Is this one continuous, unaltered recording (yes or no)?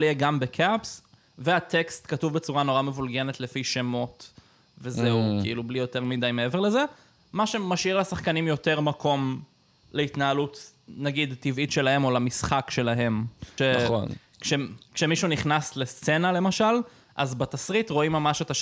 no